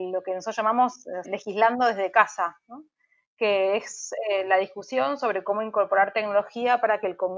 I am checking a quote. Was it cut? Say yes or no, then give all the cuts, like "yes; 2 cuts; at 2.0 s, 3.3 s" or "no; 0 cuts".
yes; 1 cut; at 1.2 s